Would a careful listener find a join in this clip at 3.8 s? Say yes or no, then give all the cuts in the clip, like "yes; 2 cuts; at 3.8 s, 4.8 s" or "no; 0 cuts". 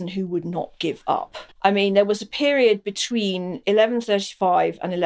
no; 1 cut; at 1.5 s